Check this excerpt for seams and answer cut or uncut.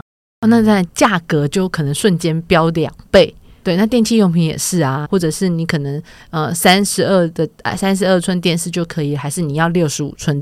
cut